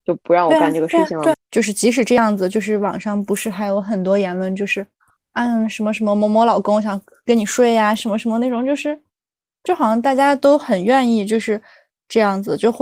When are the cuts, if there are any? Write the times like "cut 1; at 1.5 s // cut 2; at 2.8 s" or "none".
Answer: cut 1; at 1.3 s